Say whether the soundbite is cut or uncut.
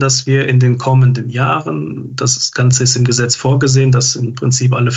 uncut